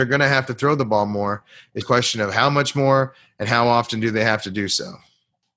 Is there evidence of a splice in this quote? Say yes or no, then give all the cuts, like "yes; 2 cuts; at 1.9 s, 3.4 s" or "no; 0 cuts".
yes; 1 cut; at 1.8 s